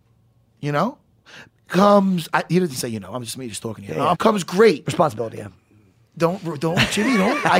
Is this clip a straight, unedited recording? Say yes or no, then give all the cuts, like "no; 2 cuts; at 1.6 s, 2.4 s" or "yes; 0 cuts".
no; 1 cut; at 4.1 s